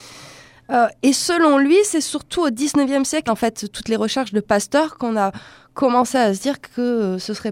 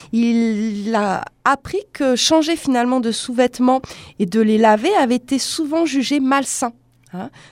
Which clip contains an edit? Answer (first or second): first